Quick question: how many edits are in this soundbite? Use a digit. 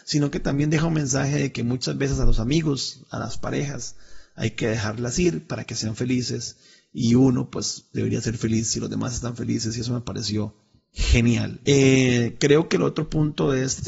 1